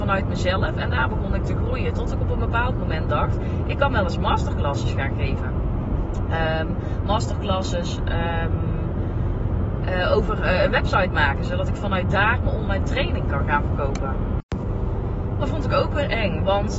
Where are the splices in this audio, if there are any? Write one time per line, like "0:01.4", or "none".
none

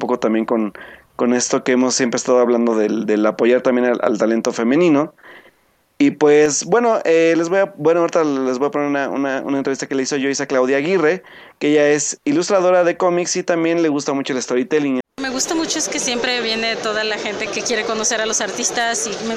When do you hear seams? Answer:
0:15.0
0:17.5

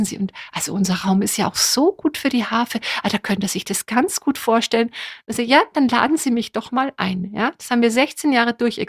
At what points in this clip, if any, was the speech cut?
none

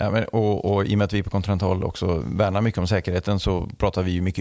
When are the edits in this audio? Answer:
none

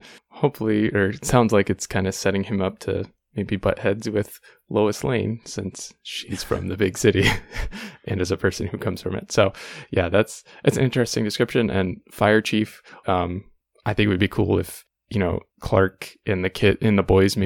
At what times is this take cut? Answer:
0:13.0
0:15.5

